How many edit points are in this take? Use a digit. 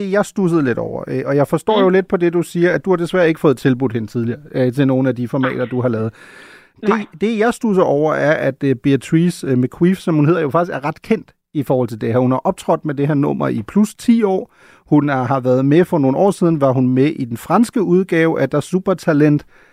0